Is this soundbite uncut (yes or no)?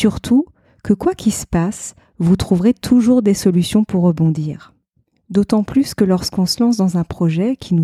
yes